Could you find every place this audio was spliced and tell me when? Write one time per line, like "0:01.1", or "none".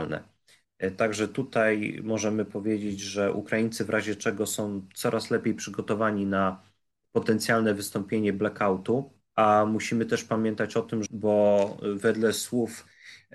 0:11.1